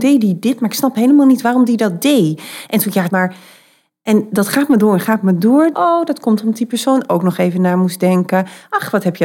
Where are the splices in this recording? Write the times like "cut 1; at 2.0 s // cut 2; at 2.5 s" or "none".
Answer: cut 1; at 3.1 s // cut 2; at 5.7 s